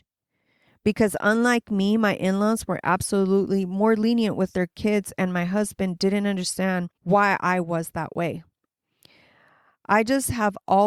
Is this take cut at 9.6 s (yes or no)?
no